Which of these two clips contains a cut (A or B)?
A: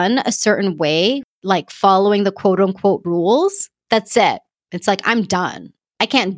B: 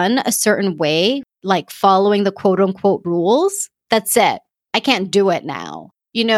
B